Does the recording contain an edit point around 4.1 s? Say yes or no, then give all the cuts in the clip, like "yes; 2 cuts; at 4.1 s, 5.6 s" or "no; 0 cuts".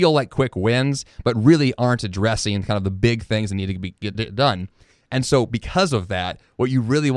yes; 1 cut; at 4.1 s